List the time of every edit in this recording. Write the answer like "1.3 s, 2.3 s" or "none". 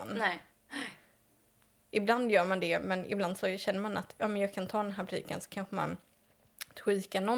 none